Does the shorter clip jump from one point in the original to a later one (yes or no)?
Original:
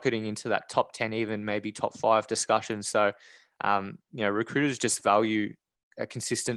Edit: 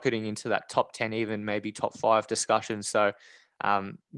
no